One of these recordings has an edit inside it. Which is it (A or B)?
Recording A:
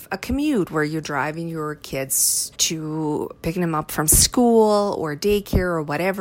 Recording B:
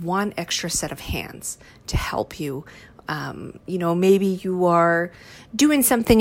A